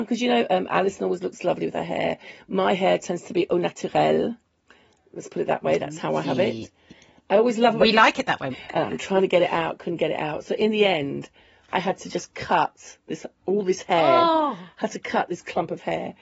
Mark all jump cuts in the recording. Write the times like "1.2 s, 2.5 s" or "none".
8.5 s